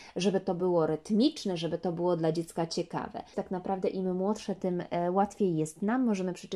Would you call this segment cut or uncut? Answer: cut